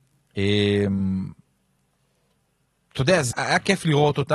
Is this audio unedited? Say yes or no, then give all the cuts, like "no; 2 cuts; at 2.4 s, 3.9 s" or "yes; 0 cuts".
no; 1 cut; at 3.3 s